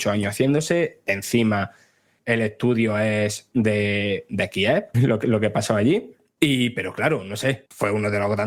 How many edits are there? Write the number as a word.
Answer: one